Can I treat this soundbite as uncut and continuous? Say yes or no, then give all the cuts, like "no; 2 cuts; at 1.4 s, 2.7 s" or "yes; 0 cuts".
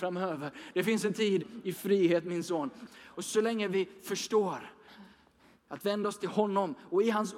no; 1 cut; at 2.9 s